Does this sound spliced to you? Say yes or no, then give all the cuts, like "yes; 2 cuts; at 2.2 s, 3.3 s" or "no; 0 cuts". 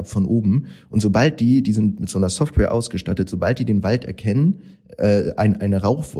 no; 0 cuts